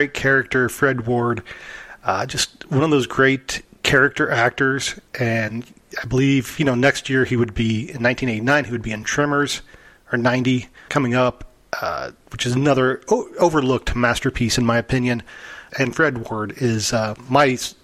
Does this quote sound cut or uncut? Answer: cut